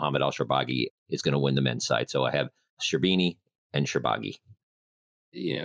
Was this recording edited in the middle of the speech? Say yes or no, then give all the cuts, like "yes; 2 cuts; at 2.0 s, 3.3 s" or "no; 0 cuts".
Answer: no; 0 cuts